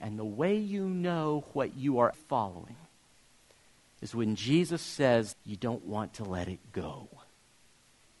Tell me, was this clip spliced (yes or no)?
yes